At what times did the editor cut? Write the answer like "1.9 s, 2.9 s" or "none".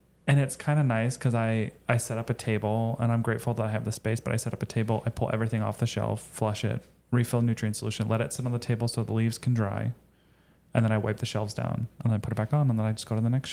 none